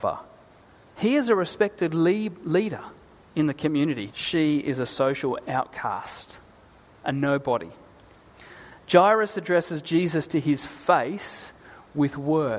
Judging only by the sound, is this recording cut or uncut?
cut